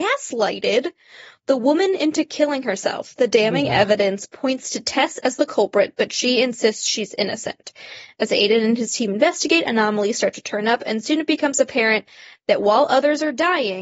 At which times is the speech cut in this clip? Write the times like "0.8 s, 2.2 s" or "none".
none